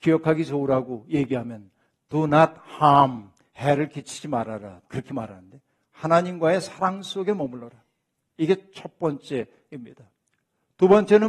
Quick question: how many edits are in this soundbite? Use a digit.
2